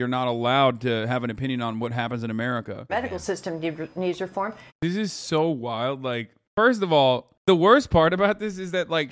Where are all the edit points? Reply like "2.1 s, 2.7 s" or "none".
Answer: 2.9 s, 4.7 s